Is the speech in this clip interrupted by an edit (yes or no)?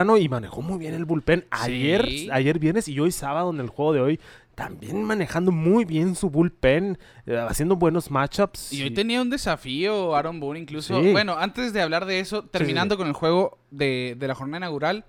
no